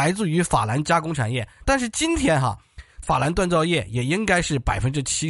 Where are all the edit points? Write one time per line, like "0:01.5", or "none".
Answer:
0:01.6
0:03.0